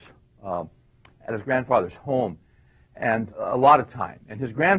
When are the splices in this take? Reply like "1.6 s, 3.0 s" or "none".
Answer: 3.3 s